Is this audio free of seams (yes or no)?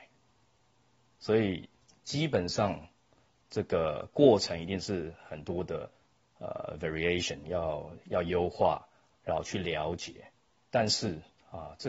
yes